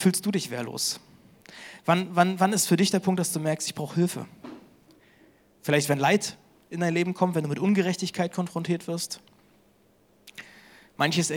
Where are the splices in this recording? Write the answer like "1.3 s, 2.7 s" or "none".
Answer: none